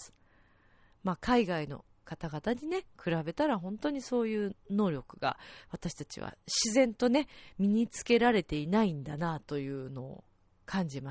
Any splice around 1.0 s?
no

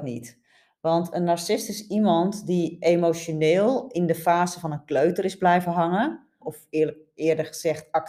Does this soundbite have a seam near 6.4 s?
yes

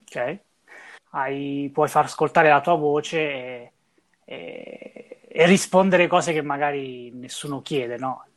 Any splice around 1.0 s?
yes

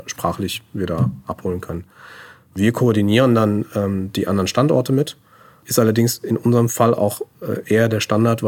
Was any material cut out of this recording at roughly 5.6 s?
no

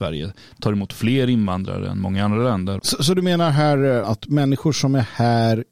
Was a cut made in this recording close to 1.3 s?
no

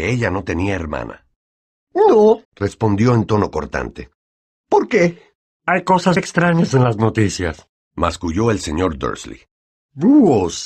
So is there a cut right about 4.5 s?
no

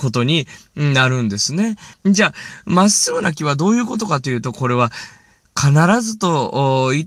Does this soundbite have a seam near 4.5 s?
no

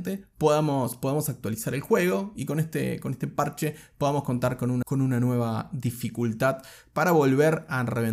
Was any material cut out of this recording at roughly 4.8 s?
yes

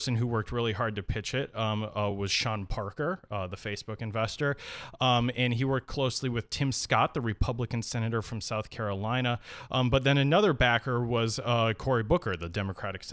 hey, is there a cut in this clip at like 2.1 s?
no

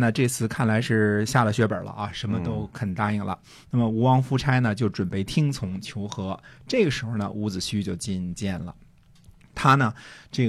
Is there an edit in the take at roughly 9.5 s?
no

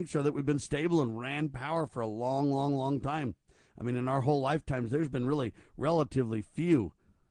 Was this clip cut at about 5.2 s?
no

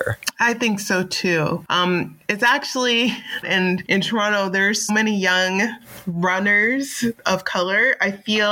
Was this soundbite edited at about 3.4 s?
yes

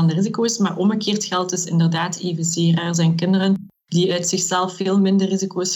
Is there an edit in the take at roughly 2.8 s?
no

